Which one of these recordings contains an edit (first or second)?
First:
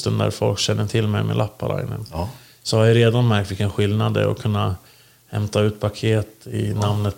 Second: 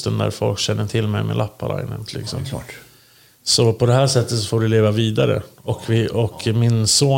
second